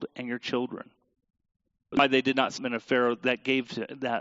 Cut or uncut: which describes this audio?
cut